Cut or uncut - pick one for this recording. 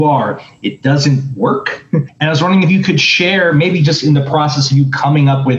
cut